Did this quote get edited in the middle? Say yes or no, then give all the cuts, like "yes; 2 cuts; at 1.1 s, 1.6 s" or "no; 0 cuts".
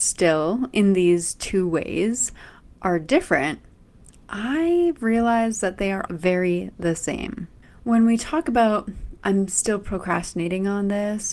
yes; 2 cuts; at 6.1 s, 9.2 s